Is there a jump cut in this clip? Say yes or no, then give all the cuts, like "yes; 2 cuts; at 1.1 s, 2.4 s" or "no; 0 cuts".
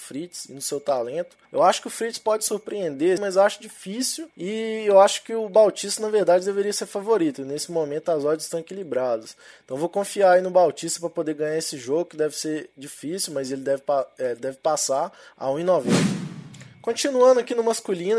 yes; 3 cuts; at 1.4 s, 3.2 s, 4.3 s